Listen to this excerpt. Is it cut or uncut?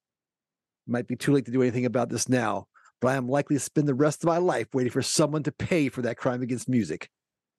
uncut